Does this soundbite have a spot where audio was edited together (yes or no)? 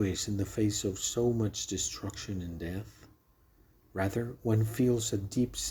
no